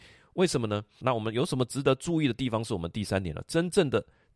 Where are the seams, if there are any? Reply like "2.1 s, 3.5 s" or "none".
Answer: 1.0 s